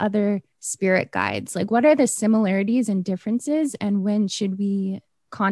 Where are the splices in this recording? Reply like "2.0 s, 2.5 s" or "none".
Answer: none